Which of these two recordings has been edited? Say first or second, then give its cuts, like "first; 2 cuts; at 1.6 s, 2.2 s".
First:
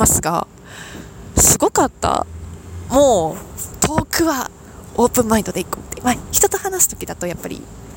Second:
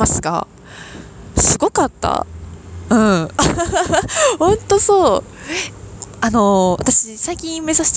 first; 1 cut; at 2.9 s